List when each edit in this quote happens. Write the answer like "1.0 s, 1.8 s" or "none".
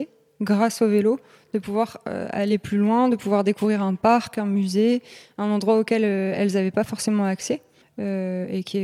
7.8 s